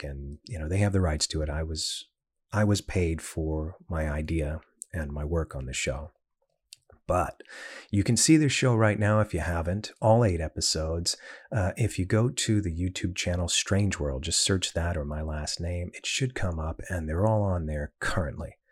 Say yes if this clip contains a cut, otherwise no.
no